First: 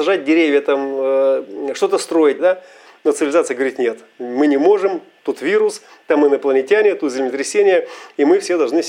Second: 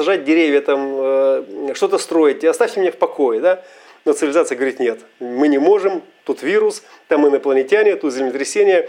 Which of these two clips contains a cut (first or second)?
first